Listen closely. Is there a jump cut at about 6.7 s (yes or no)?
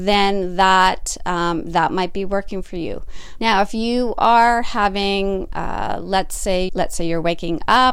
yes